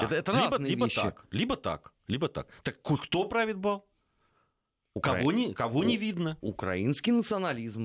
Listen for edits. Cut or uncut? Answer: uncut